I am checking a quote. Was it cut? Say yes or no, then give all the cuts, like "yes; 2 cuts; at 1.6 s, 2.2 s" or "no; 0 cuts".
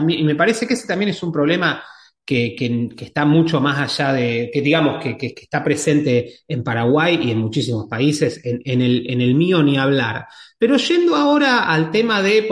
no; 0 cuts